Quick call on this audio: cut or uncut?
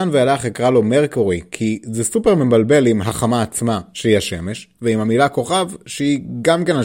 uncut